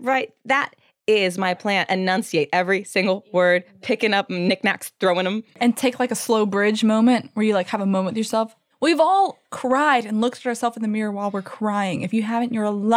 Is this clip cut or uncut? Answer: uncut